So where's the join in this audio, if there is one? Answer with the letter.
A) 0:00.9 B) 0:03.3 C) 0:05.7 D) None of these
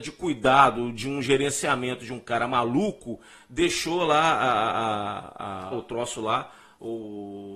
C